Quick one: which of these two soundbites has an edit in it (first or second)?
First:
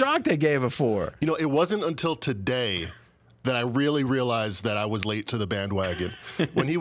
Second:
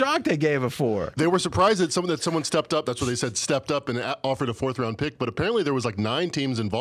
second